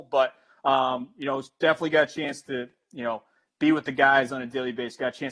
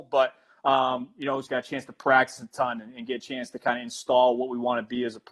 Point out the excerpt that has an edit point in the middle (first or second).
second